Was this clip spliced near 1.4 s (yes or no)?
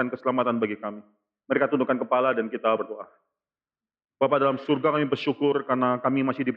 yes